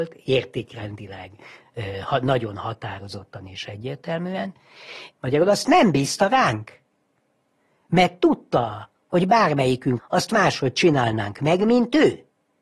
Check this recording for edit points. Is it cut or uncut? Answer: cut